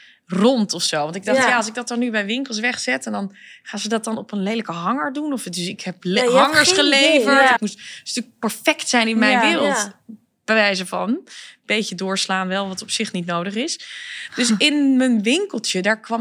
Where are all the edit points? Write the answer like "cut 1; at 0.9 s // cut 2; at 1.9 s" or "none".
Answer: cut 1; at 7.6 s